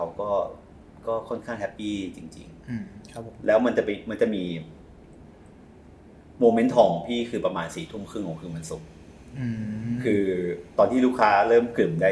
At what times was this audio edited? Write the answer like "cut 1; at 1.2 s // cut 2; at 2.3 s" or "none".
cut 1; at 10.7 s

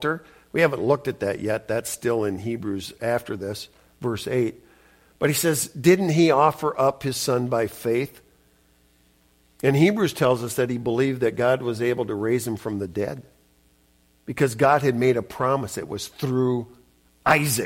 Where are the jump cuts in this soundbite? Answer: none

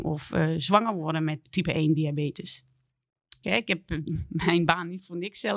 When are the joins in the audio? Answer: cut 1; at 1.4 s // cut 2; at 3.4 s

